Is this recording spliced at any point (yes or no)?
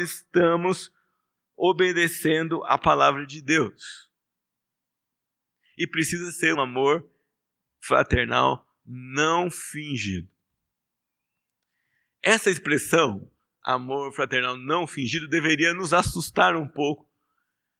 yes